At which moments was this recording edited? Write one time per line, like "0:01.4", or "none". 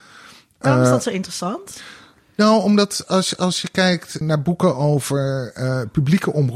0:04.2